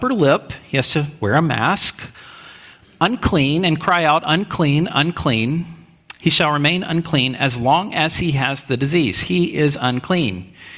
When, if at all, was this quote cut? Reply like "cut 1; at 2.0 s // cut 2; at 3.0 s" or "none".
none